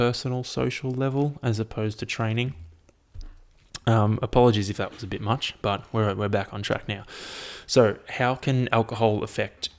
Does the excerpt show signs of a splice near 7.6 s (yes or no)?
no